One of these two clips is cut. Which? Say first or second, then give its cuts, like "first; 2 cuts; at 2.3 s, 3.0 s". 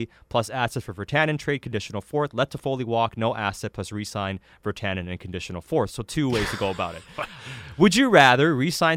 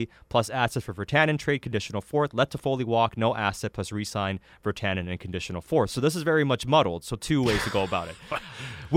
first; 1 cut; at 5.9 s